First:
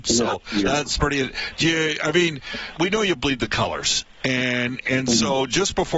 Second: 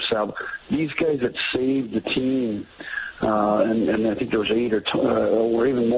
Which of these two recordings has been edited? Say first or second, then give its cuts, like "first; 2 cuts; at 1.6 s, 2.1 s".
first; 1 cut; at 2.7 s